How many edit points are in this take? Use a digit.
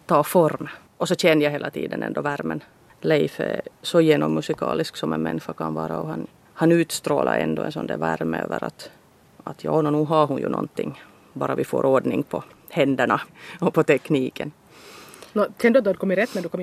0